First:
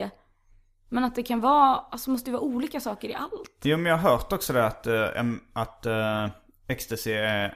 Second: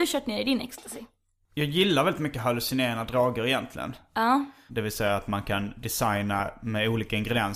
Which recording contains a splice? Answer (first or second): second